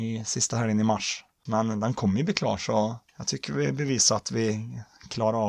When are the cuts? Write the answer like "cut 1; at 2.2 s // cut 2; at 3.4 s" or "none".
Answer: cut 1; at 1.5 s // cut 2; at 3.1 s